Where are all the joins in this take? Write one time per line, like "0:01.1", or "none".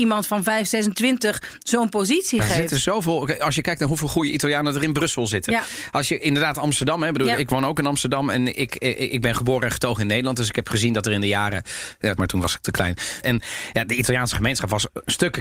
0:12.2
0:13.2